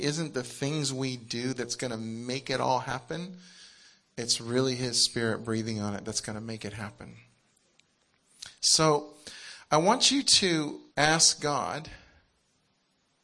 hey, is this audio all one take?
no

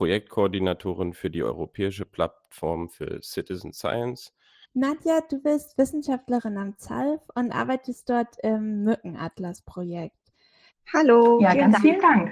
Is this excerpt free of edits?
no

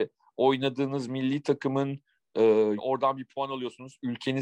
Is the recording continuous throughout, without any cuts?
no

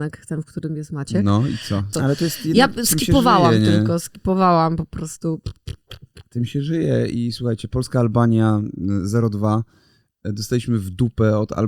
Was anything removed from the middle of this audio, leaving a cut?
yes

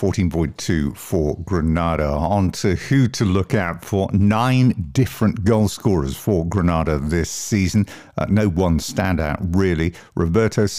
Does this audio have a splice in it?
no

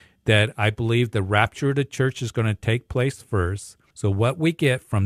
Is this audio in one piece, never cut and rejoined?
no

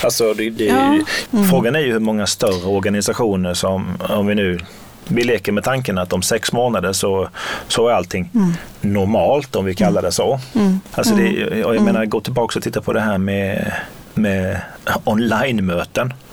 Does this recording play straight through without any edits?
no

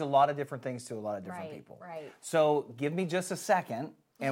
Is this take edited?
no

